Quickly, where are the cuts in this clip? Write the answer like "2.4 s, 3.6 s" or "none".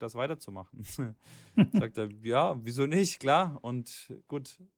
none